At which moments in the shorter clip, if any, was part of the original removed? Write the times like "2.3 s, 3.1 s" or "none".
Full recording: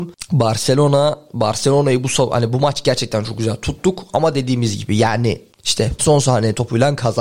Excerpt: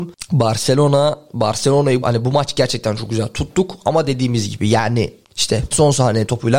2.0 s